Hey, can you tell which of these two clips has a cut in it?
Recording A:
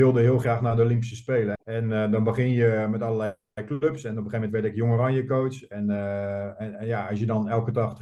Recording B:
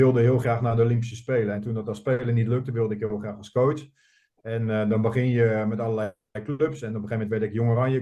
A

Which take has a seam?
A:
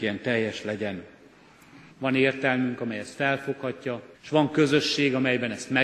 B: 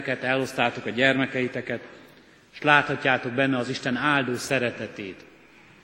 A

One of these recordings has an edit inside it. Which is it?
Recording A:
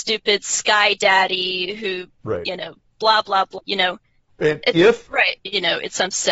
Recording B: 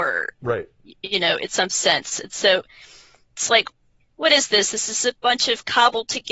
A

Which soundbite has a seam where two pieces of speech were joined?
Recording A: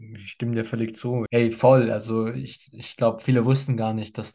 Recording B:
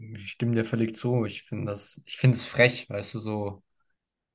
A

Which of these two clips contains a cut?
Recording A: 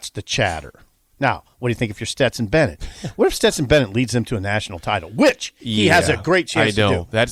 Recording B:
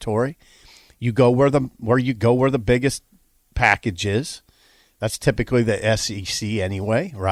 A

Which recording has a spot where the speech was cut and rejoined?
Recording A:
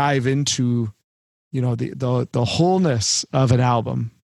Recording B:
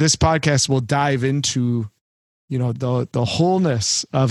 B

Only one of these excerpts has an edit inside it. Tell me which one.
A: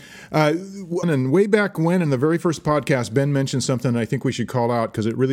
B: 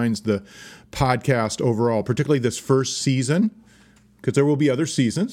A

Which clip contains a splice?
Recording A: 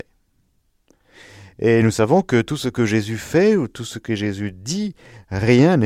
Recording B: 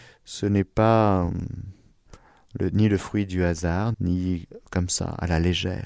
B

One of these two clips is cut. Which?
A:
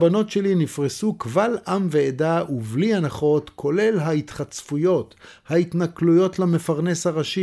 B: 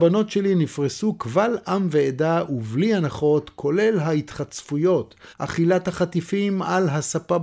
B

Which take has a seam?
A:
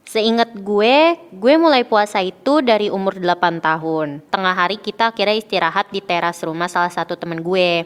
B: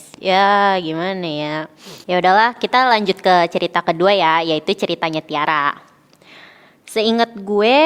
A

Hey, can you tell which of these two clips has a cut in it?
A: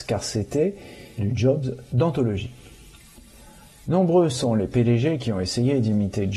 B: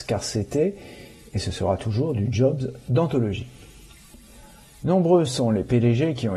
A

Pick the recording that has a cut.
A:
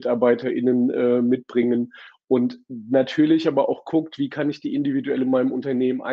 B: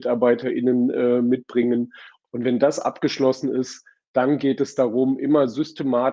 B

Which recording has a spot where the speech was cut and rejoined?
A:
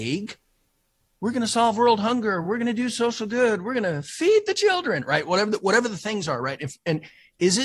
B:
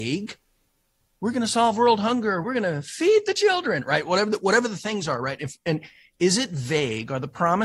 B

